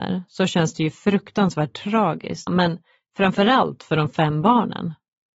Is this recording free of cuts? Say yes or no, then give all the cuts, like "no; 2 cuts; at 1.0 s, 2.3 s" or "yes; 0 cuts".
no; 1 cut; at 2.5 s